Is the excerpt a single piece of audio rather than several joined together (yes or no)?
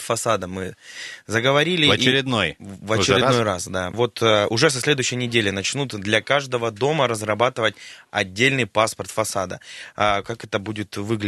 no